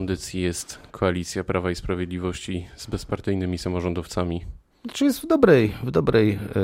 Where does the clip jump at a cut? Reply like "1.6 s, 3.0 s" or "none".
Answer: none